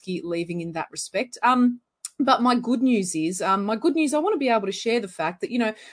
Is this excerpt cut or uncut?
uncut